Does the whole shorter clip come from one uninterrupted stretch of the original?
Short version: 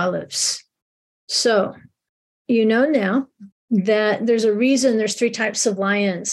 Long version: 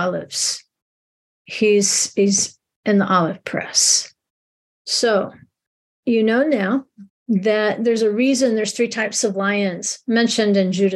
no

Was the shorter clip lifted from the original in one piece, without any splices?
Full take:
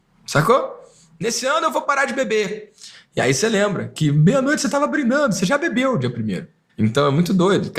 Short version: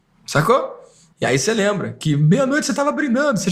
no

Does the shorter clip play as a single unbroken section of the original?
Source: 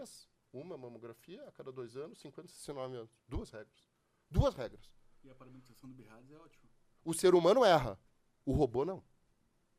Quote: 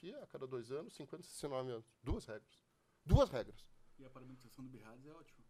yes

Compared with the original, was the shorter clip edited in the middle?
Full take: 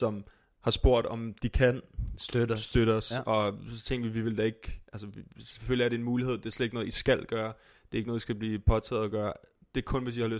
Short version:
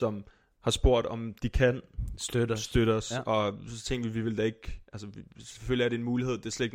no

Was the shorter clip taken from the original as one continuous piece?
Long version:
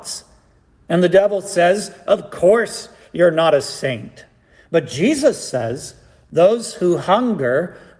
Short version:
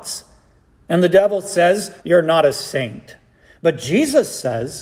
no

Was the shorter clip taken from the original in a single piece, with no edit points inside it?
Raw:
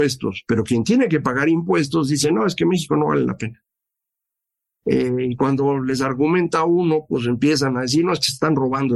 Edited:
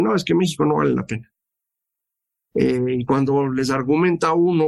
yes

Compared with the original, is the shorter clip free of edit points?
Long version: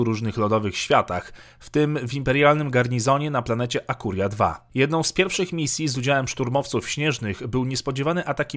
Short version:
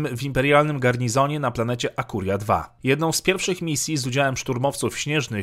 yes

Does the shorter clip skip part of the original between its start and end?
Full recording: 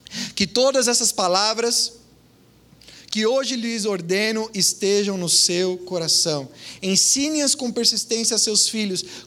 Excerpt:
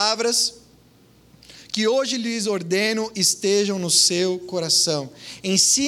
no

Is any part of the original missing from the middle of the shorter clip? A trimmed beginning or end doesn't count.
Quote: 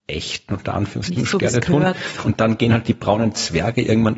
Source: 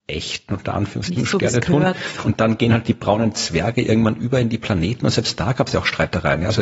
no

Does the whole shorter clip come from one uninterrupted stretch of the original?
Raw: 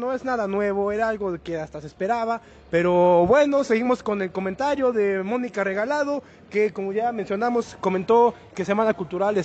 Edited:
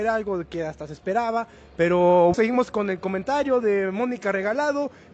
no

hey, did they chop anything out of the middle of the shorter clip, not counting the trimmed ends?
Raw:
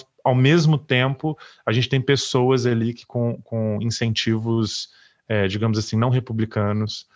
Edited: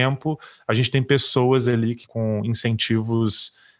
yes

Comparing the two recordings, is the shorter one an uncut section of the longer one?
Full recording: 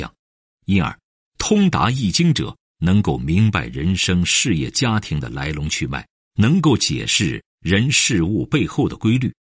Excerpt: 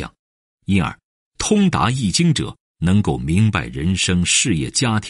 yes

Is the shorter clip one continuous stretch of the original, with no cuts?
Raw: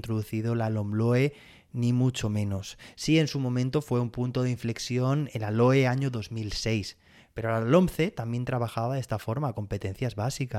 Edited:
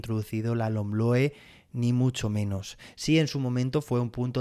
yes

